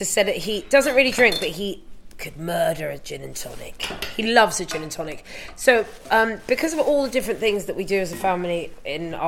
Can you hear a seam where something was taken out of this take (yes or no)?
no